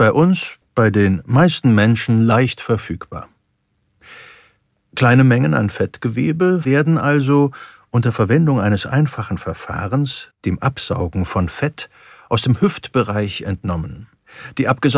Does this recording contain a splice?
yes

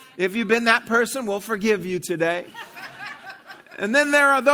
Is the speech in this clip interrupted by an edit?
no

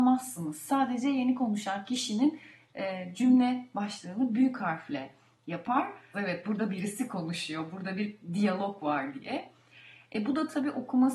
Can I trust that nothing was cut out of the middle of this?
no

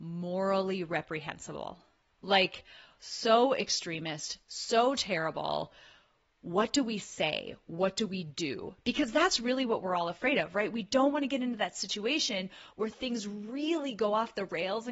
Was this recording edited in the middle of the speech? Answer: yes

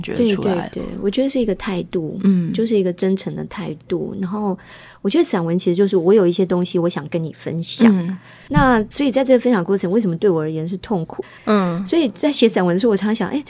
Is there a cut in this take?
yes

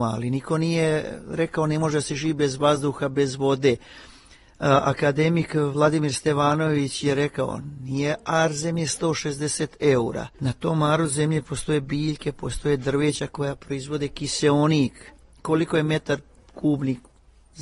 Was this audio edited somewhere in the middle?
yes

